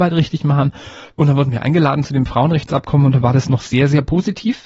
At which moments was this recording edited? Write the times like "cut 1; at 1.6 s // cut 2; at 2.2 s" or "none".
none